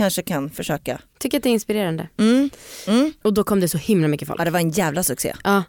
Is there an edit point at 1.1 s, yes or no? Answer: no